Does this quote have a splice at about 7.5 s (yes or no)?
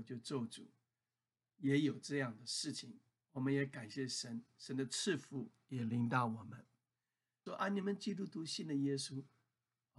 yes